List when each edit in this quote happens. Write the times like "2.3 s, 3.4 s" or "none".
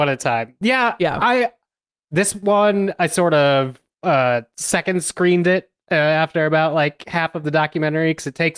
none

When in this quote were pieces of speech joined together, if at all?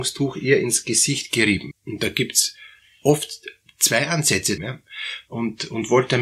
1.7 s, 4.6 s

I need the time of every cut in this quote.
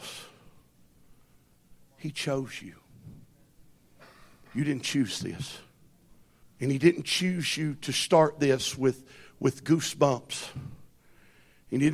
6.4 s

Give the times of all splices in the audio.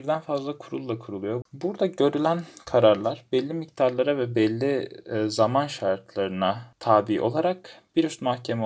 1.4 s

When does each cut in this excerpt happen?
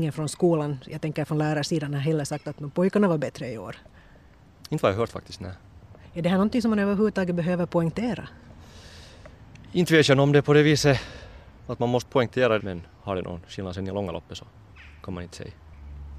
12.6 s

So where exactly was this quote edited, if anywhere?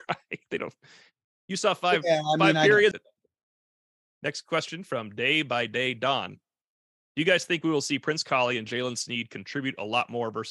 2.9 s

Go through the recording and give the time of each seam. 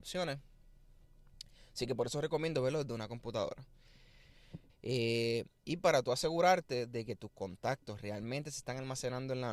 4.7 s

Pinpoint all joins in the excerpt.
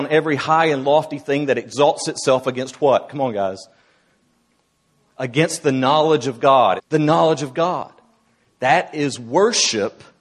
6.8 s

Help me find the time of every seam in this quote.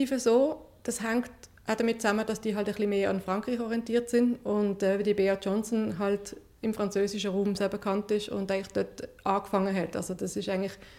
7.6 s

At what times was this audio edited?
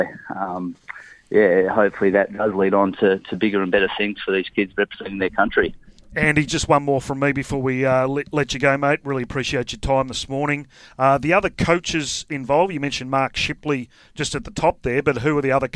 none

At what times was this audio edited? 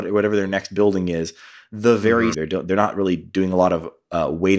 2.3 s

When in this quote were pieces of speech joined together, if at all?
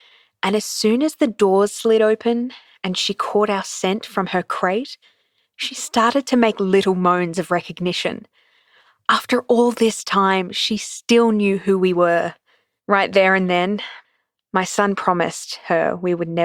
12.8 s

